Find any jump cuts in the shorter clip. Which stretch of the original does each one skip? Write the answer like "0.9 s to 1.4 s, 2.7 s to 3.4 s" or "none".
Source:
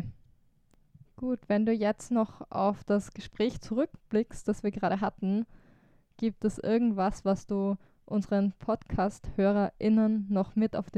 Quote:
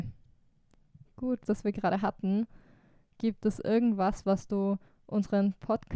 1.5 s to 4.4 s

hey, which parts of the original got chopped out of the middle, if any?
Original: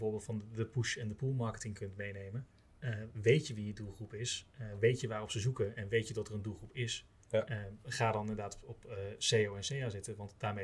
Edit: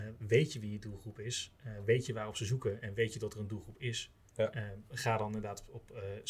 none

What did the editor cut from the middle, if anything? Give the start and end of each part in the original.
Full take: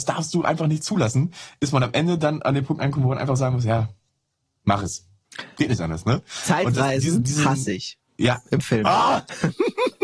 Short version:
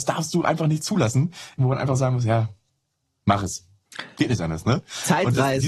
1.6 s to 3.0 s

